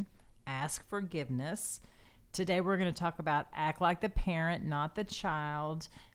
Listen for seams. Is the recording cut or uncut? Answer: uncut